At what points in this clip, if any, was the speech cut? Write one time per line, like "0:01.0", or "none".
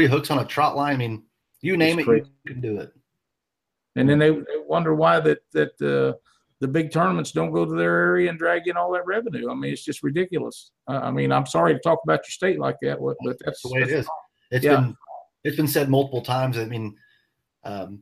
none